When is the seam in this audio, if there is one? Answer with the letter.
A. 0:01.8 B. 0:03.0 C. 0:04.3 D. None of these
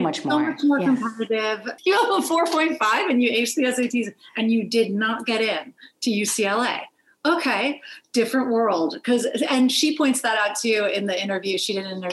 A